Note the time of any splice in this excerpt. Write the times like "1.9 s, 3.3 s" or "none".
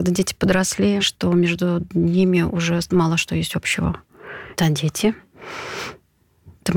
1.0 s, 4.5 s